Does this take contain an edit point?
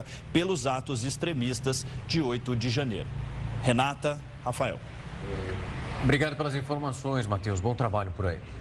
no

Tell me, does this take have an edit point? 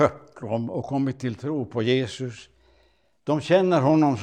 no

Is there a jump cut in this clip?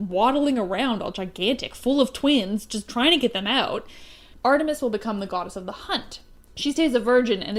yes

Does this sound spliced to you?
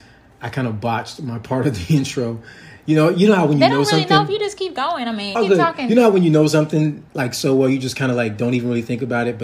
yes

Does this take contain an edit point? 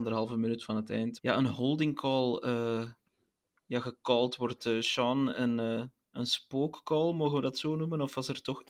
yes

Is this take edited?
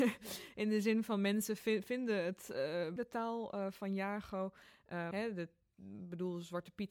yes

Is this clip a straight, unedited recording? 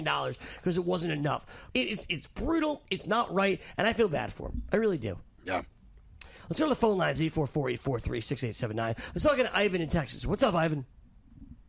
no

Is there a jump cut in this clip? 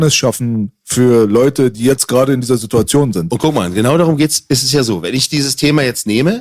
yes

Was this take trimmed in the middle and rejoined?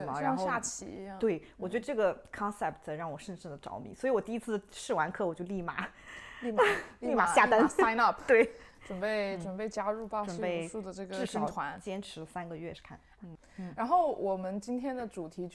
yes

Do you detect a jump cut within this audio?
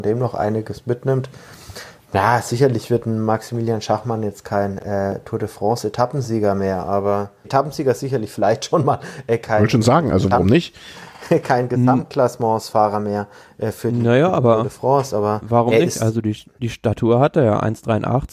yes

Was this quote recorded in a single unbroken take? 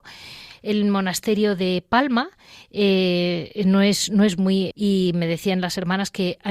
no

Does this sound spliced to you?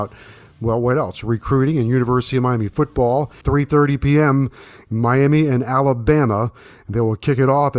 yes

